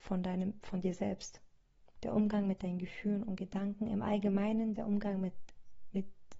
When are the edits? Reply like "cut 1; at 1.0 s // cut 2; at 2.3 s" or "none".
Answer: cut 1; at 2.0 s // cut 2; at 4.7 s